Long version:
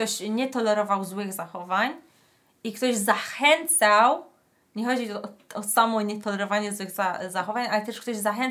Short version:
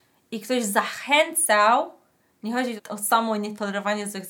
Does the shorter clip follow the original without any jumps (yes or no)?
no